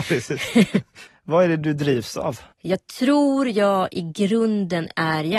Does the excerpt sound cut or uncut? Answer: cut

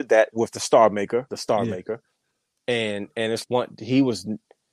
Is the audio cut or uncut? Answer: cut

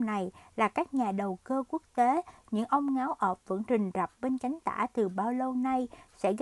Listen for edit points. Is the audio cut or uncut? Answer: uncut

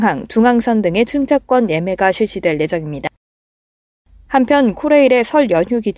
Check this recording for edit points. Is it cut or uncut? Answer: cut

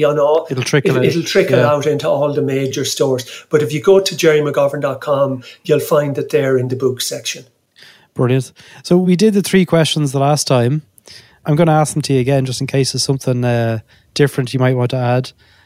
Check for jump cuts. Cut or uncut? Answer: uncut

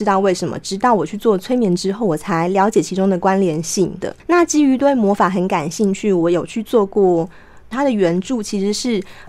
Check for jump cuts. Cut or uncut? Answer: cut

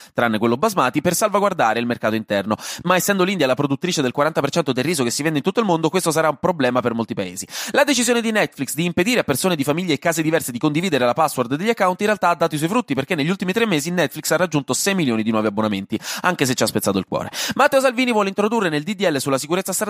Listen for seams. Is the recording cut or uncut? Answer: uncut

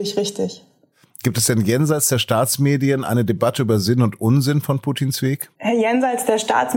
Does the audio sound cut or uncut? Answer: cut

